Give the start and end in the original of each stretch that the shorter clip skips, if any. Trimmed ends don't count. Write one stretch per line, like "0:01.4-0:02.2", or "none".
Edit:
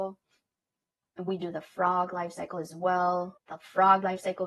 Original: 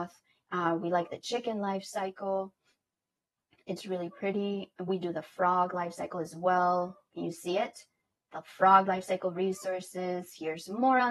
0:03.5-0:04.8
0:07.0-0:08.2